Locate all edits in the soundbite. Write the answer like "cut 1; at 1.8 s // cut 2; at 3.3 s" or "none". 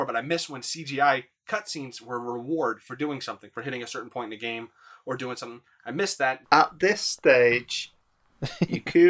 cut 1; at 6.4 s